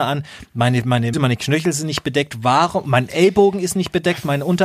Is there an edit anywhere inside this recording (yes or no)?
yes